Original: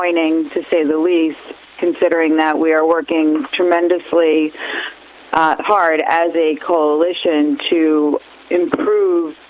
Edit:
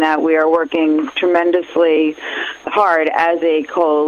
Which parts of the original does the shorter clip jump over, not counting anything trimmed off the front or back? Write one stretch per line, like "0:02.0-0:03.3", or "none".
0:05.0-0:05.6

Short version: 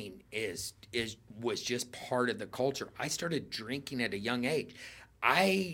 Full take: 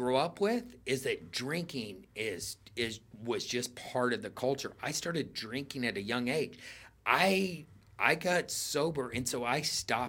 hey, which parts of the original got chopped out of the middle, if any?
none

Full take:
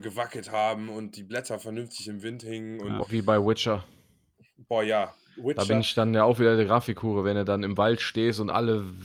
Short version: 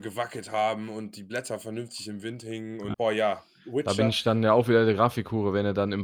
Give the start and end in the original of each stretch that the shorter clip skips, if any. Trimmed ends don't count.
0:02.9-0:04.7

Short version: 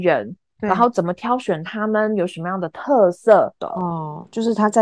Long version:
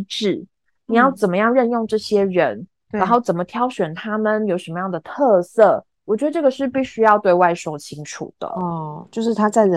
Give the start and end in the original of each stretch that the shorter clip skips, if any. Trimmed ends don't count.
0:05.9-0:08.4

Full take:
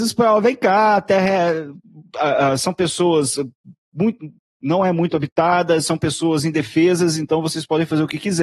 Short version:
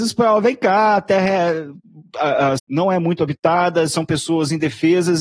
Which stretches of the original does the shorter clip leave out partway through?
0:02.6-0:04.5

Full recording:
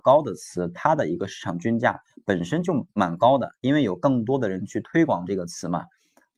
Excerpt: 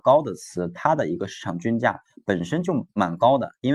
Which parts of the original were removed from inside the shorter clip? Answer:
none

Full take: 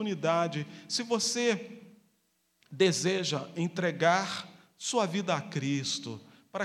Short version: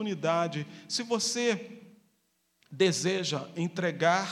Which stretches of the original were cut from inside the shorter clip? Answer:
none

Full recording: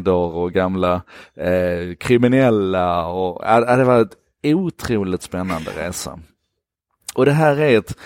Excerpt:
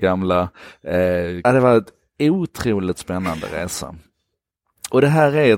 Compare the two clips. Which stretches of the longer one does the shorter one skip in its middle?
0:02.0-0:03.7

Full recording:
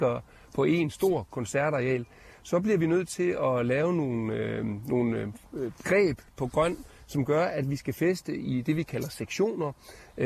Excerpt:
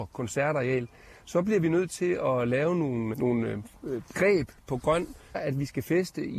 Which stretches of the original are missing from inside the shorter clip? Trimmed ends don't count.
0:04.3-0:04.8
0:07.0-0:07.5

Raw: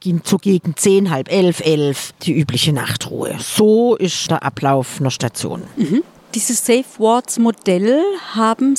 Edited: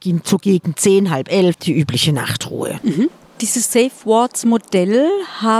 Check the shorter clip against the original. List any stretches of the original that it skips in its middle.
0:01.5-0:02.1
0:03.4-0:05.7

